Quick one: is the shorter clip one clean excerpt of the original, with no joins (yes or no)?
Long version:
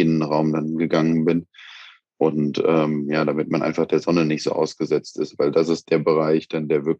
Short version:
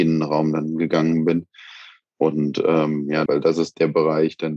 no